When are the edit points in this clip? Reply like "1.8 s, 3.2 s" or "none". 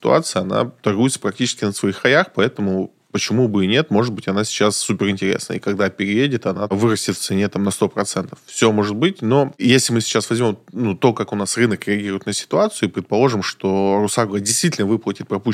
none